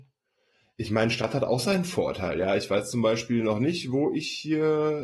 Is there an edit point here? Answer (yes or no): no